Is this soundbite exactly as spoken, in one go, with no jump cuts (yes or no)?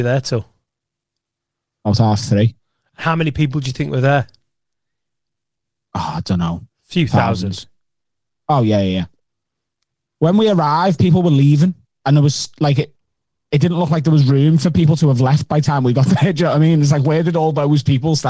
yes